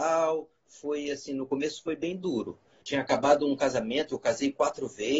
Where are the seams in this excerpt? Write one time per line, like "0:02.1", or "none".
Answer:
0:02.8